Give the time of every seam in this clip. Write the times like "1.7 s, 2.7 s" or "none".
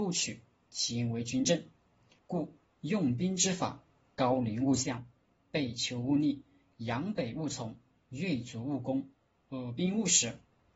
2.2 s